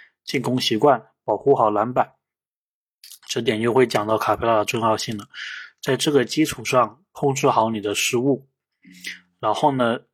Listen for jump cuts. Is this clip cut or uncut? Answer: uncut